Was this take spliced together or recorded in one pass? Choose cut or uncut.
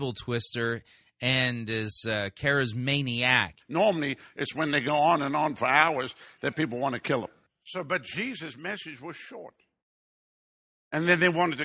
cut